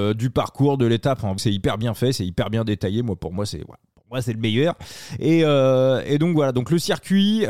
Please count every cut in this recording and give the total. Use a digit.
1